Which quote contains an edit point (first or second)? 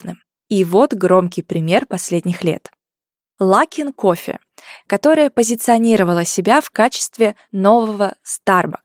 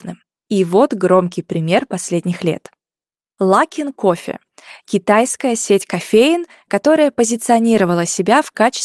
first